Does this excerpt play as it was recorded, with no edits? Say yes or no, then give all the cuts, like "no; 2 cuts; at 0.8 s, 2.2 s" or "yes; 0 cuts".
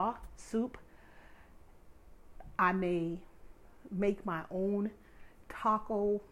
yes; 0 cuts